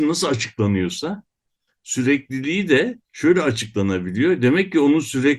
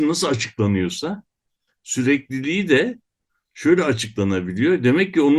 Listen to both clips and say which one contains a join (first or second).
first